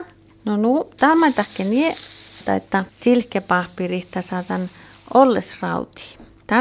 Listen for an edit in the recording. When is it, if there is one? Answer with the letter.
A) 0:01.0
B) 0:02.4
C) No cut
B